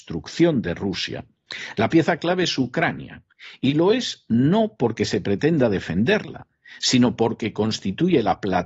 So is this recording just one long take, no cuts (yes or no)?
yes